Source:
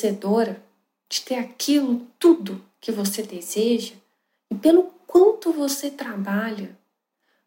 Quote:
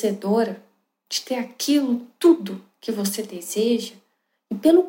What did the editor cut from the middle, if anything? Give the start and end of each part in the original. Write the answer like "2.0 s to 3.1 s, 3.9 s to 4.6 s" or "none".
none